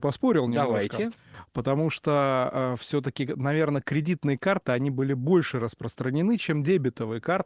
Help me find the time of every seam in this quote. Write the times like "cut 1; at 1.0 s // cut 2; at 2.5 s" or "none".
none